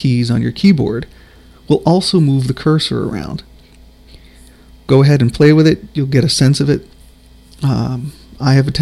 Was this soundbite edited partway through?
no; 0 cuts

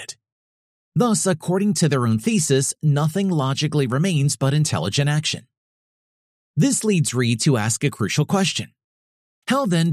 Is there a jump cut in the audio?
no; 0 cuts

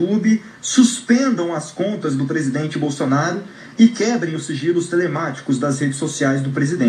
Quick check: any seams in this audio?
no; 0 cuts

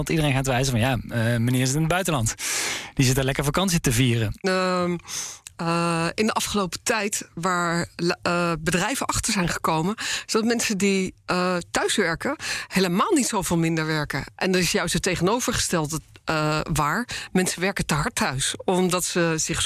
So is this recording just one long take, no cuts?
no; 2 cuts; at 4.4 s, 14.3 s

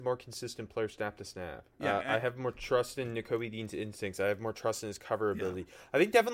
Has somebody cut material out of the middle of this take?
yes; 1 cut; at 1.7 s

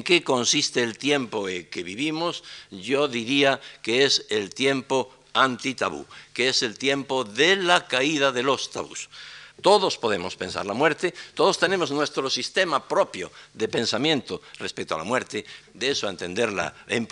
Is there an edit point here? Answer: yes; 2 cuts; at 9.5 s, 15.6 s

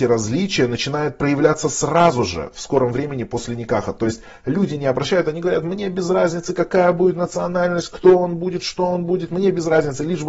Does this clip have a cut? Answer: no; 0 cuts

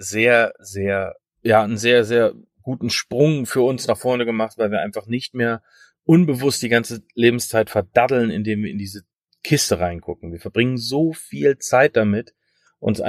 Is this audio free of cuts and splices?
yes; 0 cuts

